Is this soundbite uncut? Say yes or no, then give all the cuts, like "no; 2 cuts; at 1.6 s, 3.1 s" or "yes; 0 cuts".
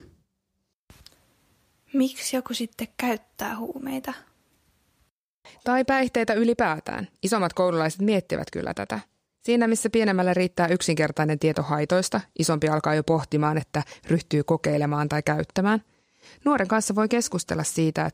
no; 1 cut; at 13.6 s